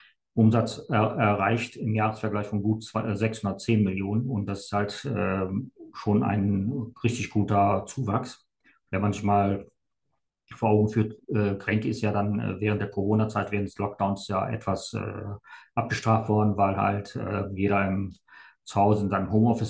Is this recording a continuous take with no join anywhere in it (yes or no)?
yes